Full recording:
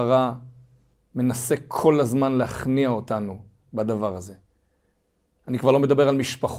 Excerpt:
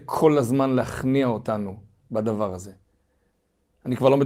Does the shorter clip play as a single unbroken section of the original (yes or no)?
yes